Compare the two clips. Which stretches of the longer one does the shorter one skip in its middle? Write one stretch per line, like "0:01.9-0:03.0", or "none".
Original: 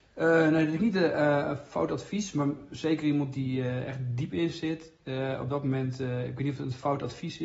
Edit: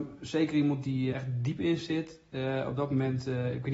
0:03.6-0:03.9